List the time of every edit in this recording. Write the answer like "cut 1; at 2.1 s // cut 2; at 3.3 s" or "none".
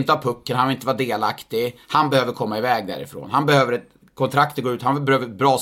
none